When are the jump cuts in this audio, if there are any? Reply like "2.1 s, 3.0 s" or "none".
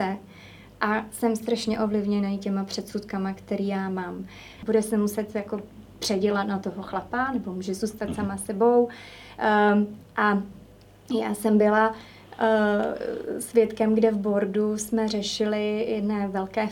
4.6 s